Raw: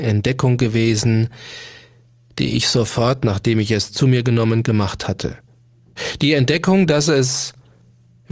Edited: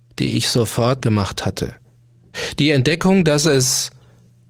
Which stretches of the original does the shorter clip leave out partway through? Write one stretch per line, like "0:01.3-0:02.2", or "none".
0:03.2-0:04.6